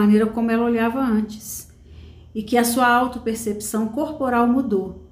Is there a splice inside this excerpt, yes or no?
no